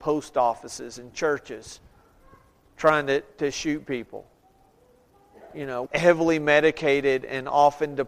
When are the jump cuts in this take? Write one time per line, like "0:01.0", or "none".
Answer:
0:05.9